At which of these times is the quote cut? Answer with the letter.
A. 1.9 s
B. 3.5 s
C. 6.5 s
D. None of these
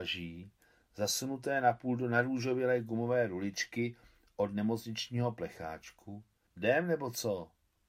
C